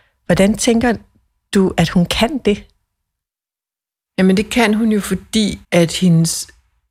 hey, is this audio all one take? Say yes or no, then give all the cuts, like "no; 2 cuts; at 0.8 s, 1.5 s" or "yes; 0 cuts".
no; 1 cut; at 5.6 s